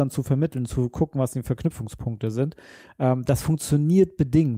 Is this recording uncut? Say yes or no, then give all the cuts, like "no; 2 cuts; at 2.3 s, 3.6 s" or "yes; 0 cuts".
yes; 0 cuts